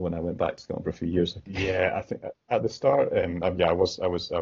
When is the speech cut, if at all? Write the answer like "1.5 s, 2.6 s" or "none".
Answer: 1.5 s